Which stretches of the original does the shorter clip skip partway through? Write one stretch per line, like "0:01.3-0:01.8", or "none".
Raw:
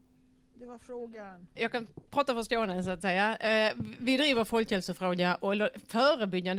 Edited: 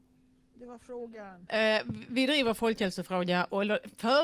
0:01.5-0:03.4